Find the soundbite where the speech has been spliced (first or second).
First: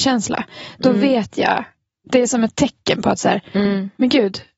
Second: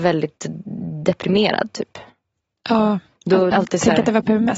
second